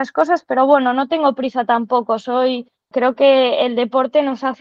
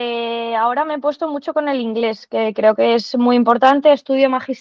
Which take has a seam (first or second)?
first